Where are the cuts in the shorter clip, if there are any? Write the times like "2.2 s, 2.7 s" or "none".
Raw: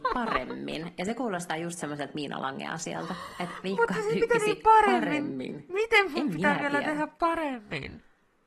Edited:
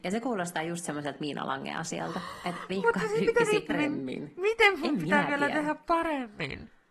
3.7 s